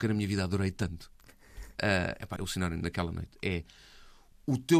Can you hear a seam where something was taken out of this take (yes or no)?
yes